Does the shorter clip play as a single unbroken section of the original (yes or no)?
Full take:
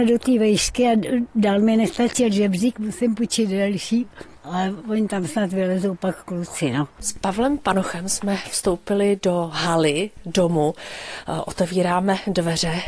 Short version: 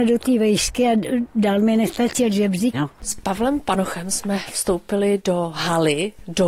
no